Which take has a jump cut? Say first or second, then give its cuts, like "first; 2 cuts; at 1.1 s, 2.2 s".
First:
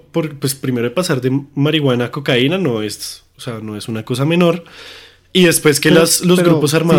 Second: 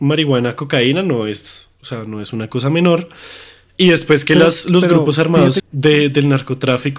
second; 1 cut; at 5.6 s